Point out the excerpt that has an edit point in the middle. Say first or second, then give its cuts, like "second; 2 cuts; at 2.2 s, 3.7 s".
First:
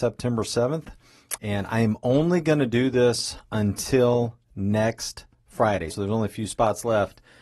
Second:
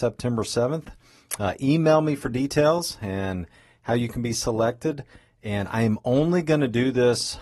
first; 2 cuts; at 1.4 s, 5.9 s